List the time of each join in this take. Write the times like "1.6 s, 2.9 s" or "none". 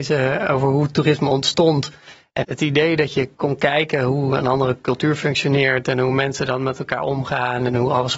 2.4 s